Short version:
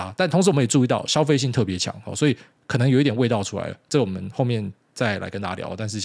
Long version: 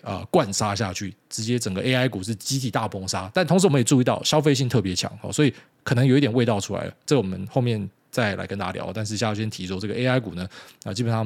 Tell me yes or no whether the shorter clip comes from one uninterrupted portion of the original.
yes